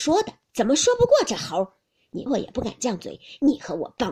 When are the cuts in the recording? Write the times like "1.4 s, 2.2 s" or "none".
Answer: 2.3 s